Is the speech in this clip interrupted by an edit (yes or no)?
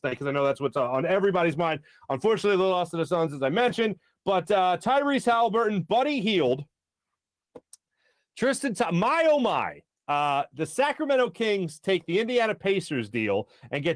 no